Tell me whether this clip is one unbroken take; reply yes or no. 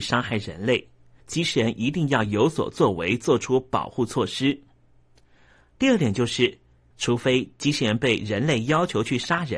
no